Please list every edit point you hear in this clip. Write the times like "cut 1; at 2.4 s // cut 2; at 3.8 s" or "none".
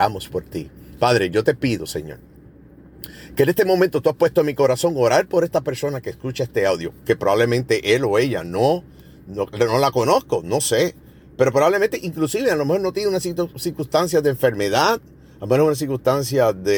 none

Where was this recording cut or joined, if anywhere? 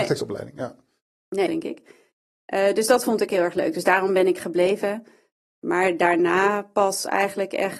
cut 1; at 1.5 s

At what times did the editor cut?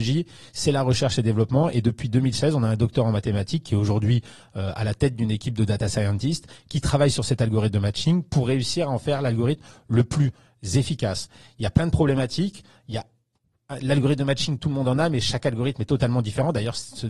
none

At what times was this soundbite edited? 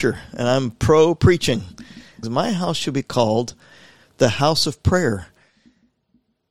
cut 1; at 2.2 s

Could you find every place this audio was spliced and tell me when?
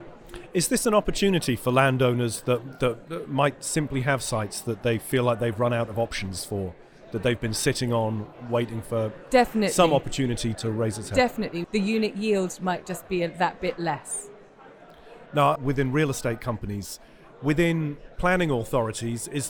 cut 1; at 10.6 s // cut 2; at 11.6 s // cut 3; at 15.6 s

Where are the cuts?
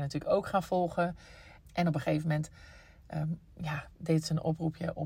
cut 1; at 1.6 s

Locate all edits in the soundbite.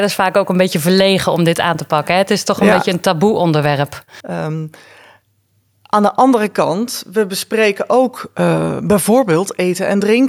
cut 1; at 4.2 s

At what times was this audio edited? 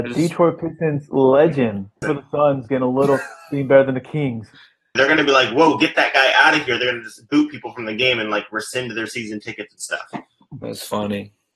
cut 1; at 2.0 s // cut 2; at 5.0 s

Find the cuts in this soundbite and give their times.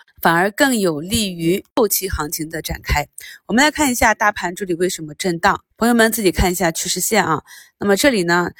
cut 1; at 5.7 s

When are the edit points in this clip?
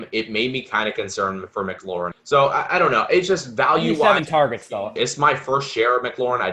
cut 1; at 2.1 s // cut 2; at 5.0 s

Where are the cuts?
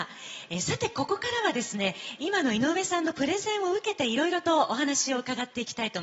none

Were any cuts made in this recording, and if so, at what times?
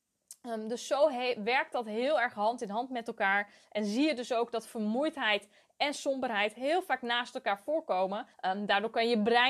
cut 1; at 8.3 s

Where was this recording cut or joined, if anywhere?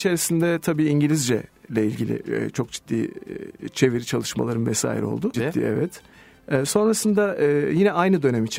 cut 1; at 5.3 s // cut 2; at 6.7 s

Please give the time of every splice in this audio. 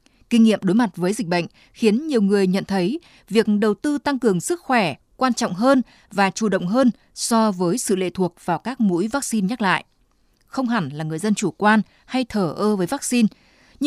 none

